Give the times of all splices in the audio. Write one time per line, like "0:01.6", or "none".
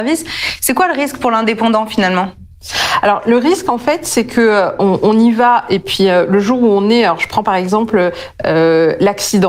none